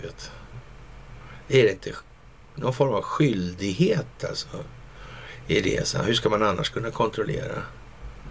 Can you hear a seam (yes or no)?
no